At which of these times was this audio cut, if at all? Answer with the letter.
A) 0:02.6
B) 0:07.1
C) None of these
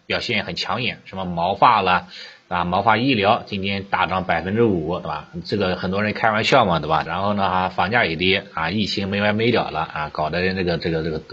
B